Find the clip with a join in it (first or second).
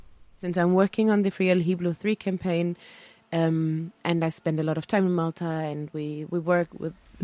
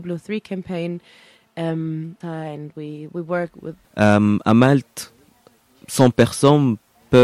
second